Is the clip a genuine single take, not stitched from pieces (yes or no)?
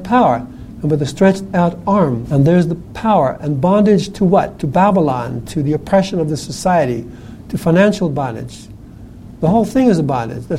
no